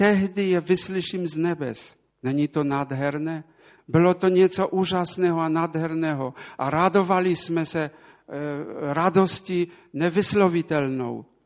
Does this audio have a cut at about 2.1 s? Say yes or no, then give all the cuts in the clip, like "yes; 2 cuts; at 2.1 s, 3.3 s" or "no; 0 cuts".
yes; 2 cuts; at 2.1 s, 3.8 s